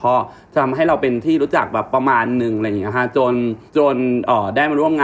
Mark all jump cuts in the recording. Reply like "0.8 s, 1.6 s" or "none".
3.7 s